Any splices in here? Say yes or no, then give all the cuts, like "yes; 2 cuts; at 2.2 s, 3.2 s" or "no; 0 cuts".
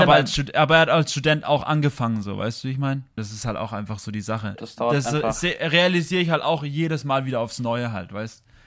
yes; 2 cuts; at 3.2 s, 4.6 s